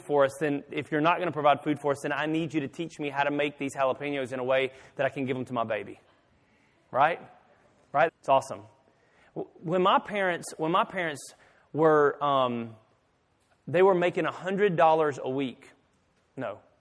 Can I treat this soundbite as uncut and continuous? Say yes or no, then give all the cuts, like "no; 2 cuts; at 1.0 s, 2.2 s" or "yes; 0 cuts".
no; 1 cut; at 8.1 s